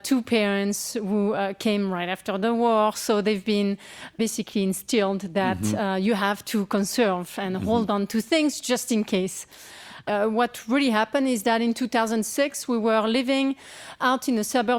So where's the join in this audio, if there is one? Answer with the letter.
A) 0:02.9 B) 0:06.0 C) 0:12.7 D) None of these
D